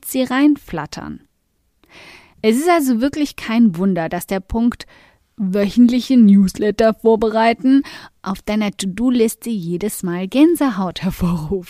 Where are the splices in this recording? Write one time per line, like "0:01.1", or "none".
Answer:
none